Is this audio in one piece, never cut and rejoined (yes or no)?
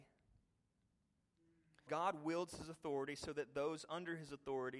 no